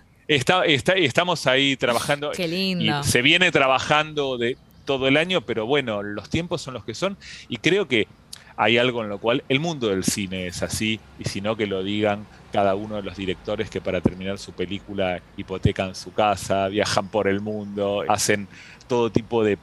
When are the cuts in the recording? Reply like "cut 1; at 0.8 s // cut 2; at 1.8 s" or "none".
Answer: cut 1; at 2.3 s // cut 2; at 18.1 s